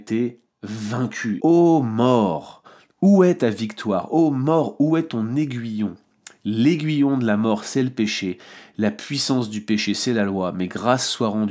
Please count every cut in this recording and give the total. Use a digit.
1